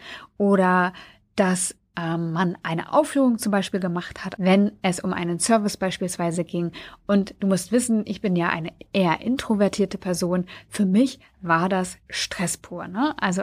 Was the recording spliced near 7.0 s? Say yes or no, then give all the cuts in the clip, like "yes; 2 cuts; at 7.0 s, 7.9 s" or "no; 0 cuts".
no; 1 cut; at 4.4 s